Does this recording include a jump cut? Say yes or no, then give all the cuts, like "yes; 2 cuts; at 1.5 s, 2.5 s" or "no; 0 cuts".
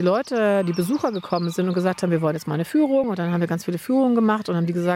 no; 0 cuts